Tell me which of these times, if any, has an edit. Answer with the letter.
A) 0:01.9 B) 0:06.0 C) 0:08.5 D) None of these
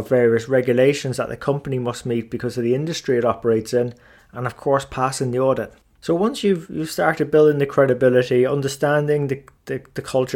B